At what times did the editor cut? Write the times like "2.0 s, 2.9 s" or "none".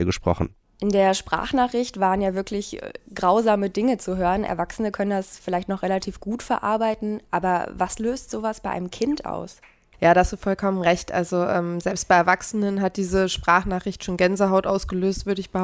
none